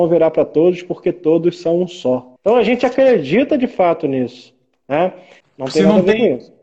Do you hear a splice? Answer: yes; 2 cuts; at 2.4 s, 5.4 s

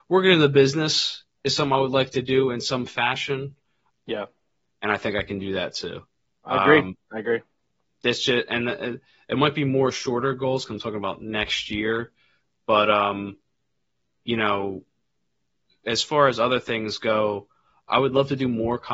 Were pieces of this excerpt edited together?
yes; 2 cuts; at 3.9 s, 17.9 s

